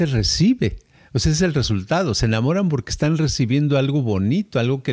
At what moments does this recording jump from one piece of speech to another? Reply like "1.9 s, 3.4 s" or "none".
none